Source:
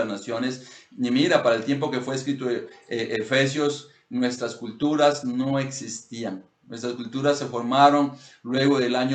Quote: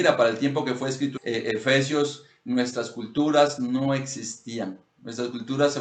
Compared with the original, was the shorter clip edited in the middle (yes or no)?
yes